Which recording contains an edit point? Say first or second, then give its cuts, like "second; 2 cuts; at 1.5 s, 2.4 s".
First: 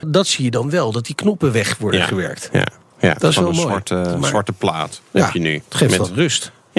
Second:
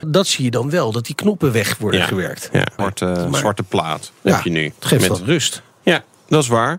second; 1 cut; at 2.8 s